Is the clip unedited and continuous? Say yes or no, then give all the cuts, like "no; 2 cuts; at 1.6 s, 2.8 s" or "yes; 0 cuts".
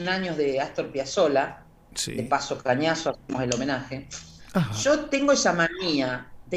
no; 1 cut; at 4.4 s